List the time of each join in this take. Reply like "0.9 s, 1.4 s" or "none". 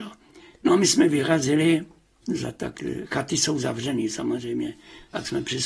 2.2 s